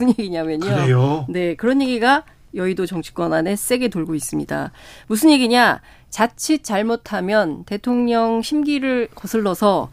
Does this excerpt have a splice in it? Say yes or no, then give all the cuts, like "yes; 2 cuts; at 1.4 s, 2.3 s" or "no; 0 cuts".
no; 0 cuts